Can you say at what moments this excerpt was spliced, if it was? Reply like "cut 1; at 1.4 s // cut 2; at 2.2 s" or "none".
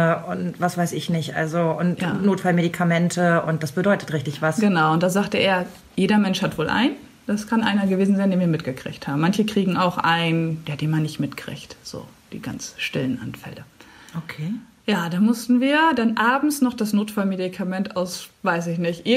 none